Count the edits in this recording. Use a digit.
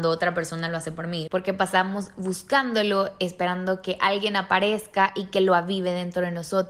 1